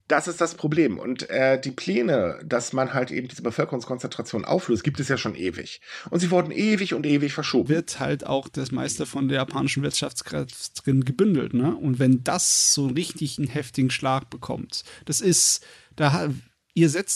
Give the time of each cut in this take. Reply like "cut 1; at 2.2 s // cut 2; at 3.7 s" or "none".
cut 1; at 7.7 s